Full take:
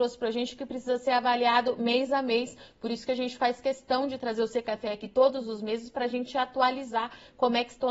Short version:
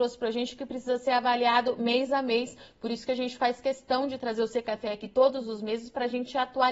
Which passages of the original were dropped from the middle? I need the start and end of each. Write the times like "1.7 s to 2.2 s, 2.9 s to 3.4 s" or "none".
none